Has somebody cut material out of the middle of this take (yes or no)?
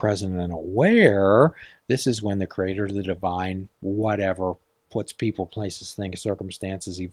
no